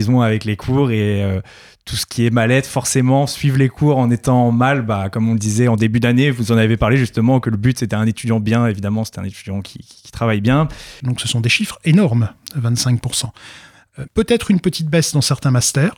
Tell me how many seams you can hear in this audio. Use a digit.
2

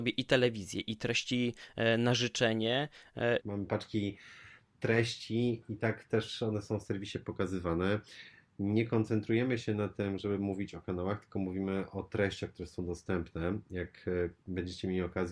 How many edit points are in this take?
1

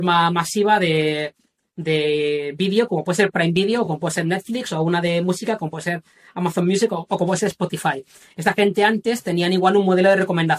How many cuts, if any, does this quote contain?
0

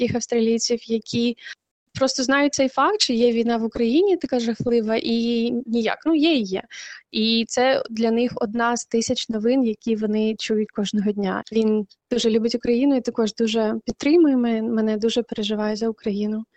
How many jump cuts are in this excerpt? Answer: 1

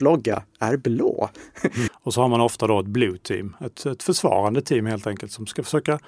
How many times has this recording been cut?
1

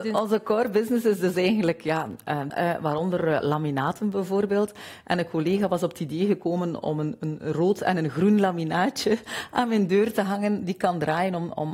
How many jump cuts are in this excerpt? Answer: 1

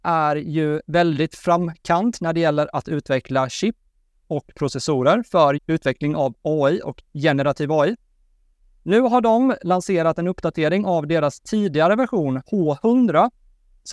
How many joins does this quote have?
1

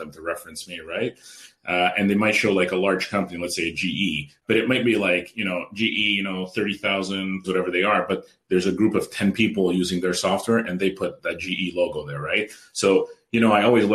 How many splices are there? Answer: 2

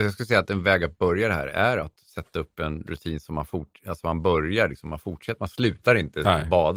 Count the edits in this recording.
0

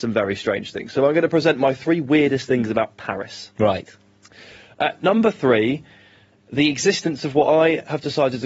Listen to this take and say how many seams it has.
0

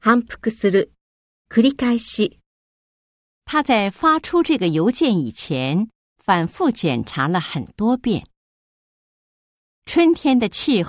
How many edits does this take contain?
0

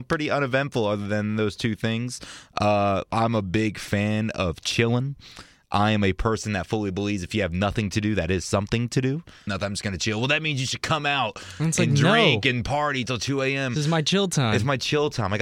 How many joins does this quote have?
1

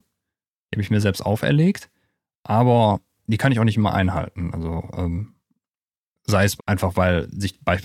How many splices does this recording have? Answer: 1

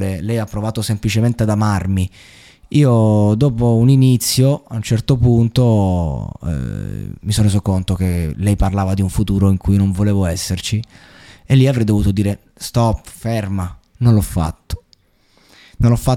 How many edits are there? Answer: 0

